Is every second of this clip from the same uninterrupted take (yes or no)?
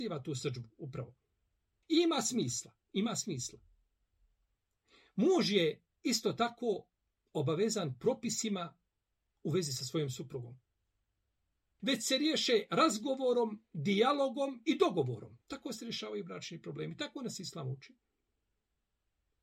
no